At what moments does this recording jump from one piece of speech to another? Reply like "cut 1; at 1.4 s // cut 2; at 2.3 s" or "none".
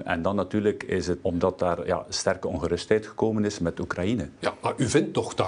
cut 1; at 1.2 s